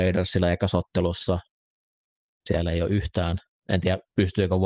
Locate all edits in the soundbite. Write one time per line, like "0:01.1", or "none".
0:02.3